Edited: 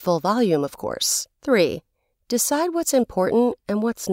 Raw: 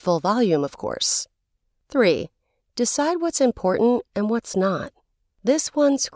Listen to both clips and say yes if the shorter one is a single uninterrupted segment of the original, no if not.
no